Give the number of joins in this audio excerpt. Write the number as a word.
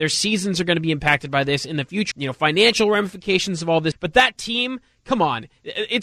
two